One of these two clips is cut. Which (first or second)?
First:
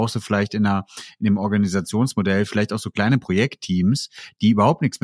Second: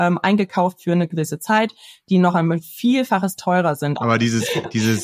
second